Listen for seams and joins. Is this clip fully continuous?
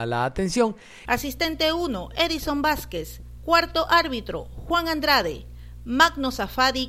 no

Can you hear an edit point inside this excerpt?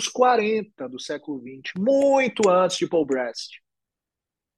no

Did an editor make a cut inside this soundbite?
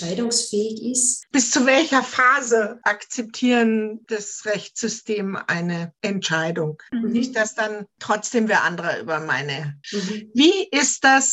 yes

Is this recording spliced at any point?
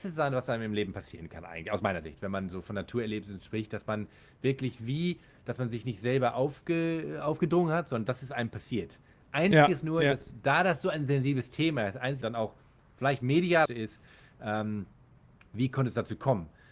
yes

